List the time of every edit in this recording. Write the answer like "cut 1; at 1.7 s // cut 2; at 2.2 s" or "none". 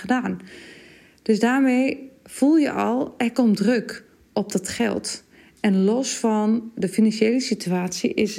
none